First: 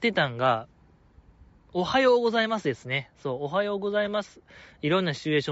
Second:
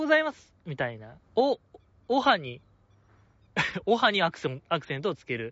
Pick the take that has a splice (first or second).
second